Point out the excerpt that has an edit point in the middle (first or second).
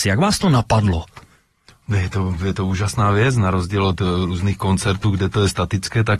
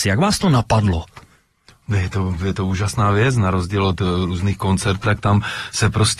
second